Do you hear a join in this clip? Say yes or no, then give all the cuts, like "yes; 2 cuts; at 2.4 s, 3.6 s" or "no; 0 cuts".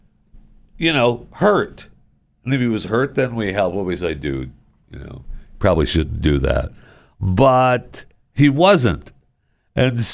no; 0 cuts